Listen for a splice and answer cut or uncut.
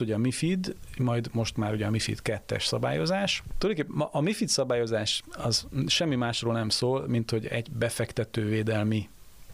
uncut